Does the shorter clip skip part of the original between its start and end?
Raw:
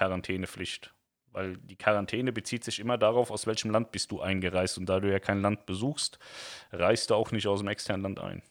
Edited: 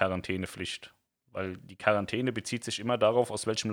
no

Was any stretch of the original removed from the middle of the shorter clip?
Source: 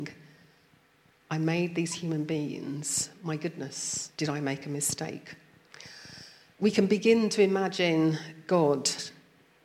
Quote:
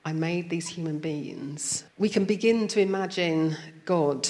yes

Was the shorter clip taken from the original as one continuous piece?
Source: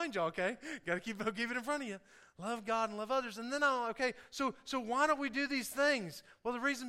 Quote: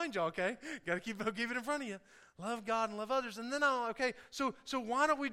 yes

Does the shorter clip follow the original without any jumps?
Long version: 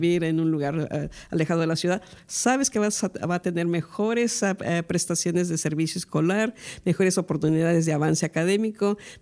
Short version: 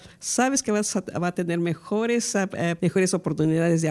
no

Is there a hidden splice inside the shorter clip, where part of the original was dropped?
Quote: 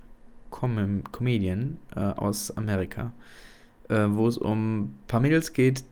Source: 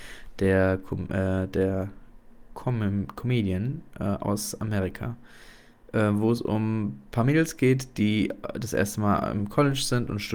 no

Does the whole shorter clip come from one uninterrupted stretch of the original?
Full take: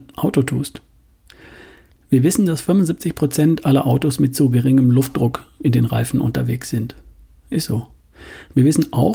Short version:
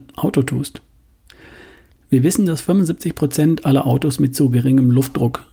yes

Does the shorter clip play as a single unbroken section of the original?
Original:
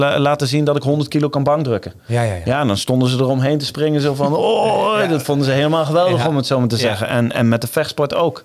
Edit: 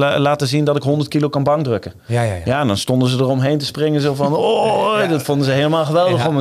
yes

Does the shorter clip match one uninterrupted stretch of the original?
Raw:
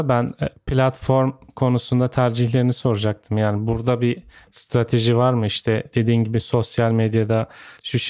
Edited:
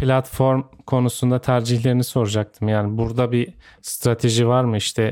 yes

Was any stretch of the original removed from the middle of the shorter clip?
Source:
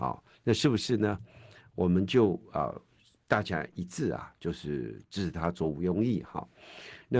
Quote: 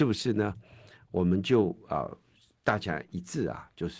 no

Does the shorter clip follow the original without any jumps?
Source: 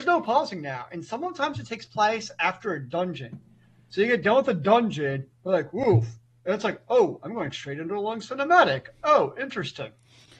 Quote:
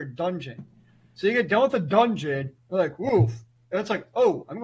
yes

